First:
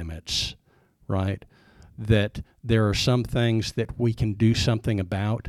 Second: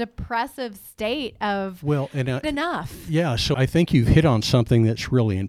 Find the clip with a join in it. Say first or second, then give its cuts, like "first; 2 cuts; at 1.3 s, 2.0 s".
second; 2 cuts; at 2.4 s, 3.5 s